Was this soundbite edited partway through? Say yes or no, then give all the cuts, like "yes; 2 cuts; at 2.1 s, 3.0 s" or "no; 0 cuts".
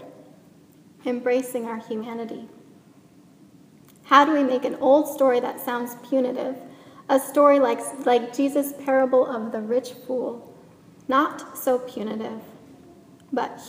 no; 0 cuts